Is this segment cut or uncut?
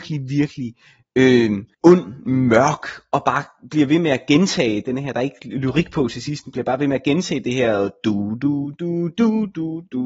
cut